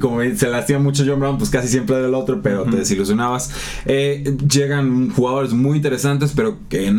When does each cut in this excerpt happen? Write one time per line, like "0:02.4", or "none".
none